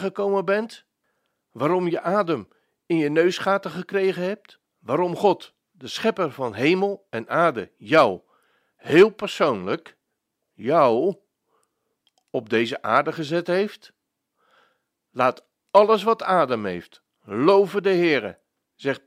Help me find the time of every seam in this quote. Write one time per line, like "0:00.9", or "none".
0:04.7